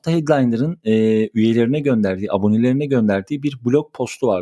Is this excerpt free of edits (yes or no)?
yes